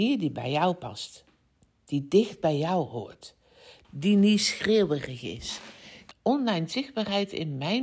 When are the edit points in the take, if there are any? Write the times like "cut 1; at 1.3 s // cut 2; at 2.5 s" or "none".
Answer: cut 1; at 3.8 s // cut 2; at 6.1 s